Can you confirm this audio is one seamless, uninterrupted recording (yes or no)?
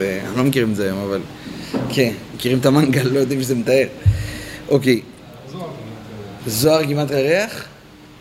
no